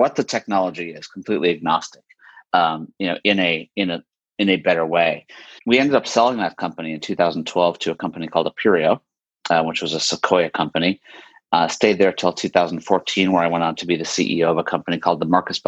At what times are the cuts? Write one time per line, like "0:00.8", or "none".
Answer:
0:05.6